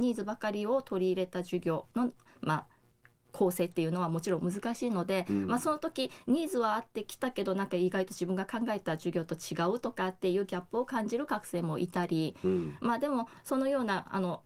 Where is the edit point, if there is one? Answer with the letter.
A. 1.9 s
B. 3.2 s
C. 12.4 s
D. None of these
A